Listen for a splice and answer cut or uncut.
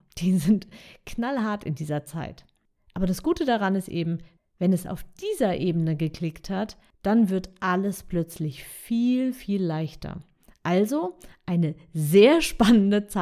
uncut